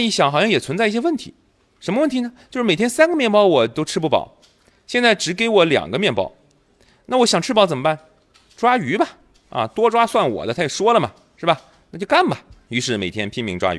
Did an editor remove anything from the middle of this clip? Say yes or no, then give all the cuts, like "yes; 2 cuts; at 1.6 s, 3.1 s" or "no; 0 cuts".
yes; 1 cut; at 12.7 s